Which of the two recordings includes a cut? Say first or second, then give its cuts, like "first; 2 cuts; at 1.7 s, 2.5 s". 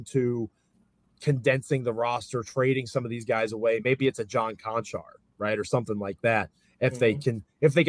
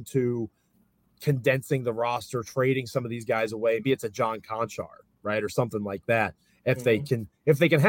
second; 1 cut; at 3.8 s